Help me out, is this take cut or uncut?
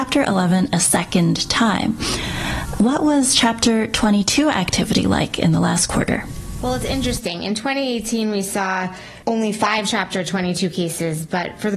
cut